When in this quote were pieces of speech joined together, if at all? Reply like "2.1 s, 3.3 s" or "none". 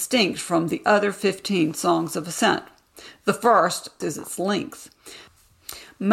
4.0 s

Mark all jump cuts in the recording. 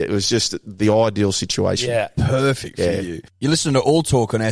none

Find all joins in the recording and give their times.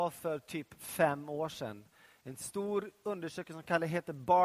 none

